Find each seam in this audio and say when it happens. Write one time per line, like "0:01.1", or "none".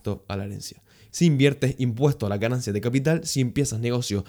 0:01.1